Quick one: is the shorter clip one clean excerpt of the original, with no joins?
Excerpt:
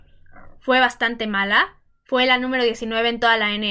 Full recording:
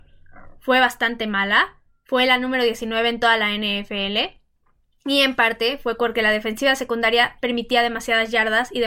yes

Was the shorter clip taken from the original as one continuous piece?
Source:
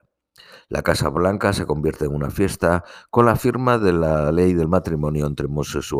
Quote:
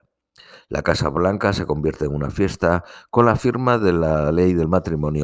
yes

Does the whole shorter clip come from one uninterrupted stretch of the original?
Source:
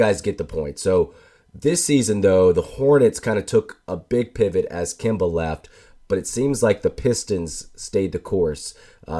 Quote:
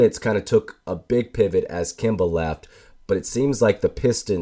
yes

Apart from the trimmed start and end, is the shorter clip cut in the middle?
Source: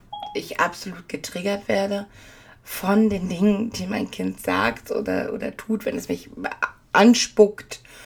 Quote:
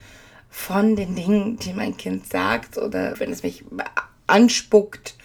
yes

